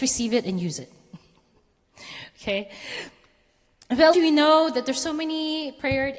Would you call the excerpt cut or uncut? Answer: cut